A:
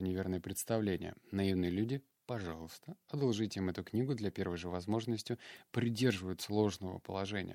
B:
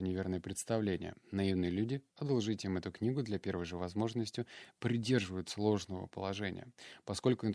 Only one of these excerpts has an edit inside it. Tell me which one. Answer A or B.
B